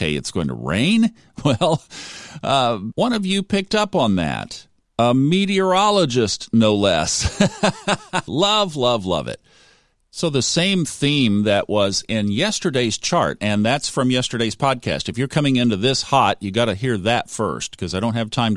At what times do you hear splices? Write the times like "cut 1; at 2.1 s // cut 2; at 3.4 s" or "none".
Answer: cut 1; at 8.3 s // cut 2; at 10.0 s